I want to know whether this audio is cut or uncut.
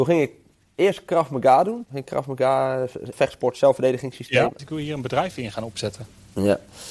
cut